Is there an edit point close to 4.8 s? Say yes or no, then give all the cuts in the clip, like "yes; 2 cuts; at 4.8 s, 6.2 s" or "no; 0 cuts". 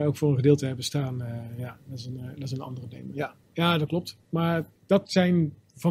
yes; 1 cut; at 4.8 s